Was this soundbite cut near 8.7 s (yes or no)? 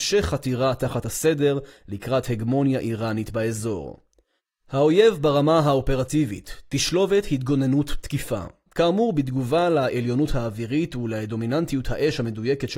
yes